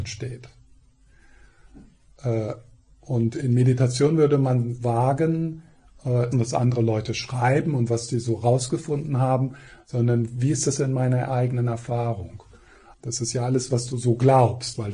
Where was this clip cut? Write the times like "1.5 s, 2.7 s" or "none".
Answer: 6.3 s, 12.9 s